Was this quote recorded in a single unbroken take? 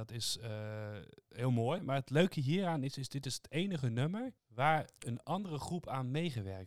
no; 2 cuts; at 1.8 s, 4.4 s

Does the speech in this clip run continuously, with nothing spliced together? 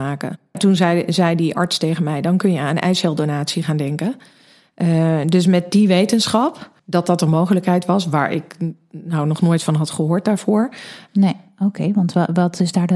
no; 2 cuts; at 6.8 s, 11.1 s

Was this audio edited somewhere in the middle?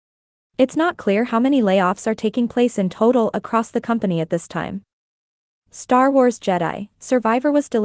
no; 0 cuts

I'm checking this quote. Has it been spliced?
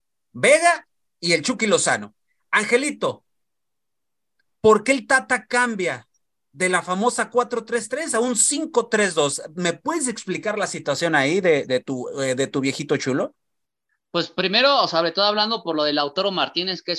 no; 0 cuts

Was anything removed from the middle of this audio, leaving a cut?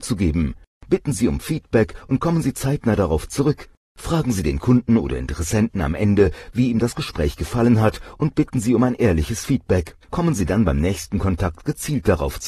yes; 2 cuts; at 3.8 s, 10.0 s

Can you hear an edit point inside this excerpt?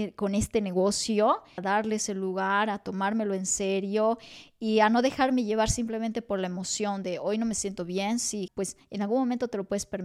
yes; 2 cuts; at 1.6 s, 8.5 s

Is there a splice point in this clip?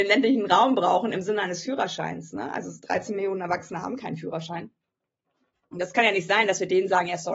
no; 0 cuts

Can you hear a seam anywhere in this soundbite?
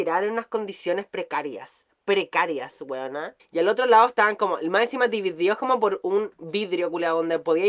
yes; 1 cut; at 3.4 s

